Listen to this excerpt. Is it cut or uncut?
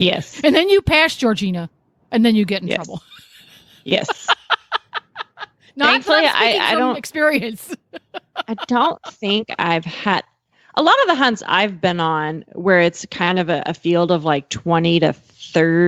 uncut